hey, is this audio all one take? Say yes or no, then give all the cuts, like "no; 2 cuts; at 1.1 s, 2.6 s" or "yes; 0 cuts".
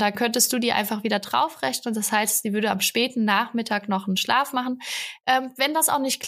yes; 0 cuts